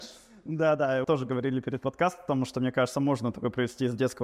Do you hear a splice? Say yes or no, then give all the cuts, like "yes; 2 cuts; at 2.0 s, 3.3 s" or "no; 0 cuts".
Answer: yes; 1 cut; at 1.0 s